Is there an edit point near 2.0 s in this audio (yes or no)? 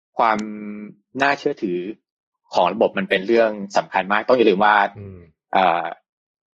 no